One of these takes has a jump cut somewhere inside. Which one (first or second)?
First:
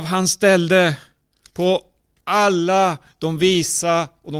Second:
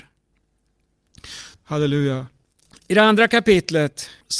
second